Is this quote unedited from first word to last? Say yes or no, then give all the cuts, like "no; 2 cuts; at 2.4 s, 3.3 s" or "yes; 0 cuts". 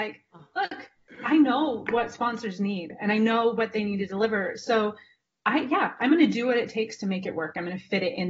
yes; 0 cuts